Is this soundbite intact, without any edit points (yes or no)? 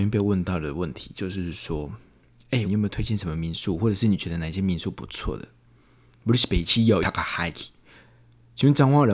no